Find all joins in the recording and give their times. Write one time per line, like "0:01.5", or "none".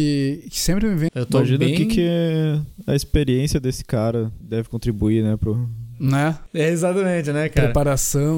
0:01.1